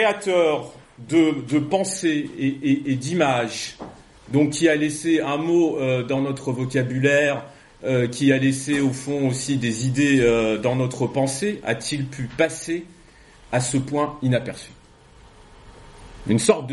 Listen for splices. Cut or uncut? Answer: uncut